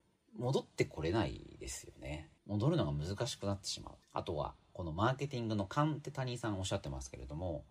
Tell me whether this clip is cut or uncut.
cut